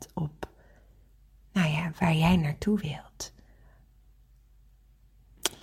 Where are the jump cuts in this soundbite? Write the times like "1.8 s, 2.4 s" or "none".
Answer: none